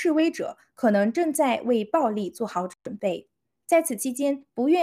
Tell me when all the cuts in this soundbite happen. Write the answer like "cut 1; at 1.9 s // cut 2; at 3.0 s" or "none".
cut 1; at 3.6 s